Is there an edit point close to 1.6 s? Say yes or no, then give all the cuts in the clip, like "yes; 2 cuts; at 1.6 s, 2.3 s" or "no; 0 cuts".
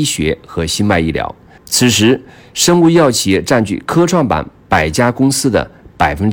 yes; 1 cut; at 1.6 s